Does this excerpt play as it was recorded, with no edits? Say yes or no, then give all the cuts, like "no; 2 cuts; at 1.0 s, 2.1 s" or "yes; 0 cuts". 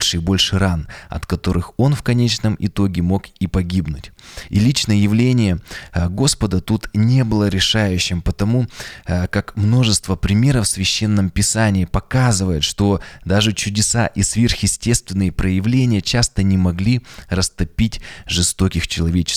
no; 1 cut; at 4.5 s